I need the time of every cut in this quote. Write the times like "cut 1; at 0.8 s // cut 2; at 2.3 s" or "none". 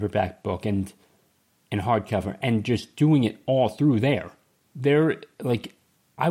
cut 1; at 4.6 s